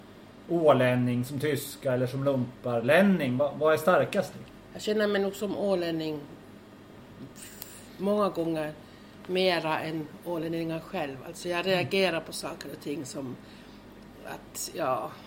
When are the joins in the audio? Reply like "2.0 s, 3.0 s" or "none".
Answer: none